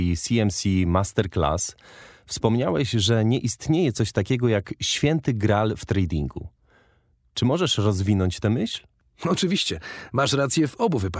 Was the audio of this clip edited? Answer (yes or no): no